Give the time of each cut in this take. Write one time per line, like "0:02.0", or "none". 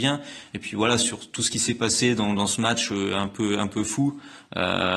none